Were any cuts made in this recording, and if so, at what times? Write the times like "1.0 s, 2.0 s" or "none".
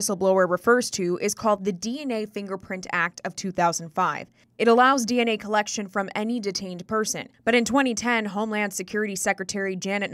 none